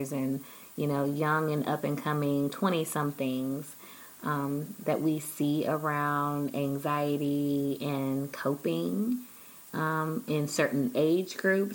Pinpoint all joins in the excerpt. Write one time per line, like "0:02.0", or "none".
0:04.8